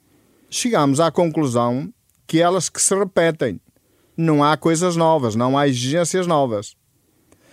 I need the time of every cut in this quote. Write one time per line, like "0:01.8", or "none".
none